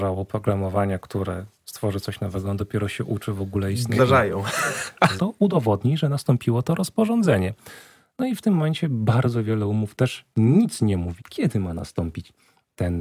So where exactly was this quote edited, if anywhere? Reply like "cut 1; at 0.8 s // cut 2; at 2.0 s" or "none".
cut 1; at 4.0 s // cut 2; at 5.2 s // cut 3; at 11.2 s